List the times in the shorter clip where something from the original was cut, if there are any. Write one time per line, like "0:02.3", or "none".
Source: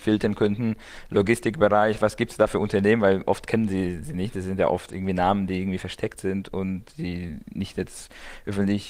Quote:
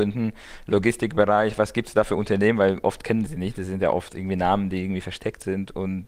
0:03.3